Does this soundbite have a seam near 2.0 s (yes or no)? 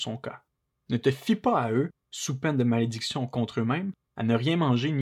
yes